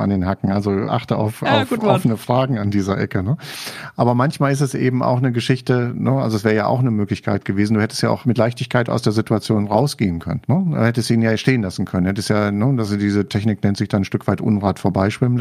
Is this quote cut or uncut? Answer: uncut